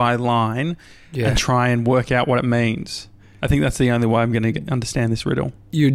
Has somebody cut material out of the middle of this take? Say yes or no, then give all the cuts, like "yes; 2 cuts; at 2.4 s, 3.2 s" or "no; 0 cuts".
no; 0 cuts